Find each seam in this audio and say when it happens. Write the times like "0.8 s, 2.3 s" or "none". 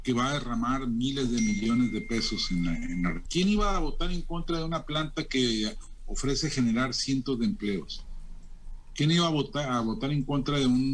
3.3 s